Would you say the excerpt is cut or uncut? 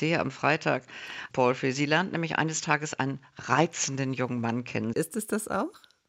cut